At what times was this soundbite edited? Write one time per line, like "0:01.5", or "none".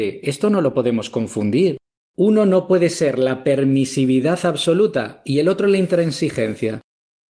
0:02.0

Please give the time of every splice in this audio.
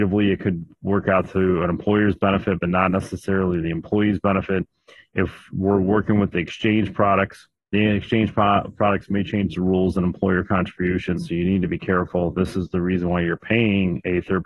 none

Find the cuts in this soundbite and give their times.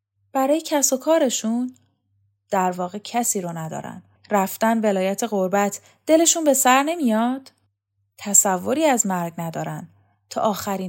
0:04.1

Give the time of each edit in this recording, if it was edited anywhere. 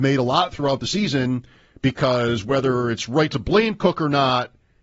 none

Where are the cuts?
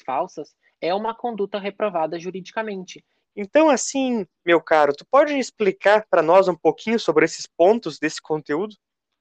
0:03.2

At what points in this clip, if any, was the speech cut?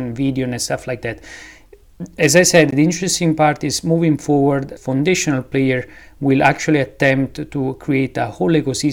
0:04.8

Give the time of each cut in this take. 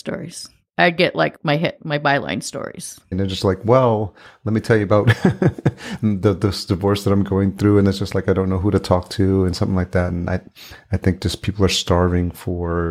0:03.1

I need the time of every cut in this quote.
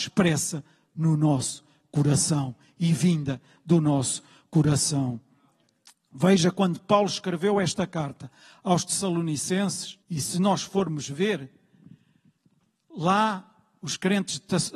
0:10.0

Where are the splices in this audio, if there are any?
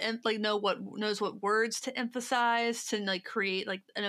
none

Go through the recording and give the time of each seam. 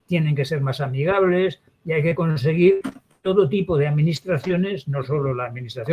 none

